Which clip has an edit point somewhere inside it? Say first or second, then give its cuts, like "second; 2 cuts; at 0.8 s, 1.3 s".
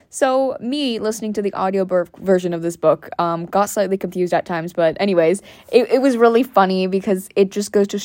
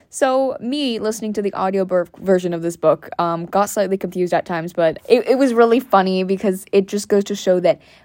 second; 1 cut; at 5.0 s